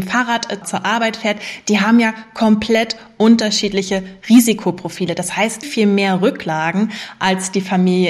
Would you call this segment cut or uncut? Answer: cut